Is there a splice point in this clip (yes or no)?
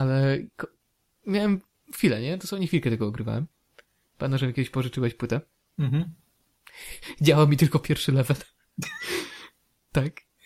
no